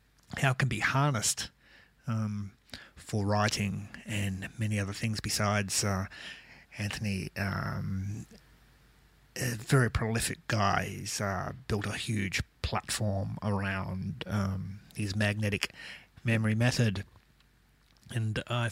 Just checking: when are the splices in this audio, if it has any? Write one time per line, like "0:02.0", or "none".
none